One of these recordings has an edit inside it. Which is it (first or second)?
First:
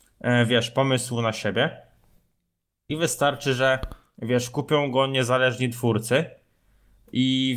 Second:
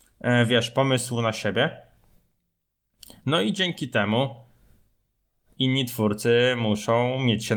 first